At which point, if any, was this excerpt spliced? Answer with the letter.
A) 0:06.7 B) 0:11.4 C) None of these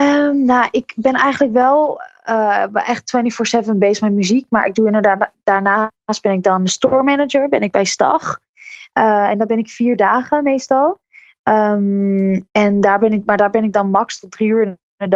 A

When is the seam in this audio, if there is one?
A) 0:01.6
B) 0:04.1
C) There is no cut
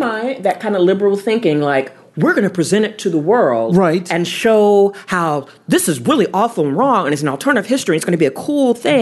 C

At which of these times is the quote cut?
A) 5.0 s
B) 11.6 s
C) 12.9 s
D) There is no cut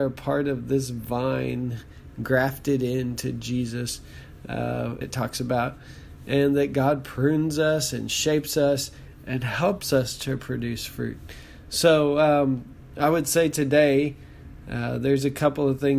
A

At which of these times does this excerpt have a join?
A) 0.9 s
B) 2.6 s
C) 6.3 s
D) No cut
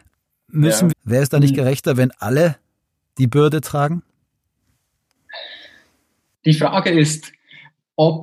A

